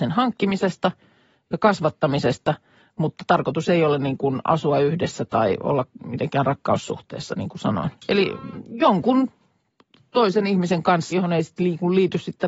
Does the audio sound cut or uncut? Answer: cut